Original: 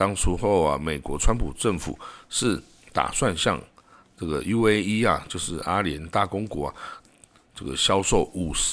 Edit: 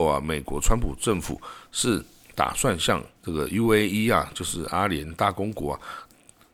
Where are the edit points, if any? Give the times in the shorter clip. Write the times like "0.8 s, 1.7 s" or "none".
3.2 s